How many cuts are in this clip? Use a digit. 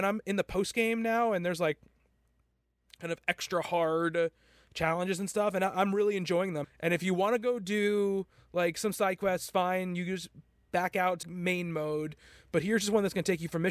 2